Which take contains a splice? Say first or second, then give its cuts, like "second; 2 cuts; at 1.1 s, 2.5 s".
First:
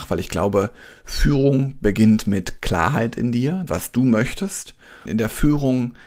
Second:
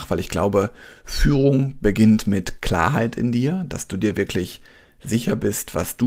first; 2 cuts; at 3.7 s, 5.1 s